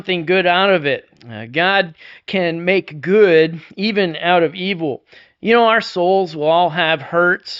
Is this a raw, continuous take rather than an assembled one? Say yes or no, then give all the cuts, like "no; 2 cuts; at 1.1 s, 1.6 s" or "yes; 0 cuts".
yes; 0 cuts